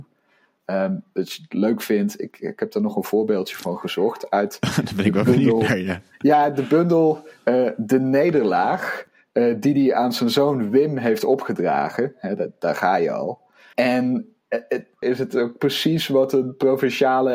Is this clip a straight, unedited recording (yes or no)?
no